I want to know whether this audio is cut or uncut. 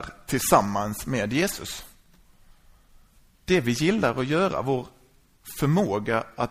cut